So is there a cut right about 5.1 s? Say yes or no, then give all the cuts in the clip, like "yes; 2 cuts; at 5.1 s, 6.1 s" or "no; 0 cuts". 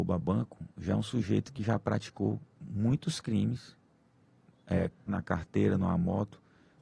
yes; 1 cut; at 5.1 s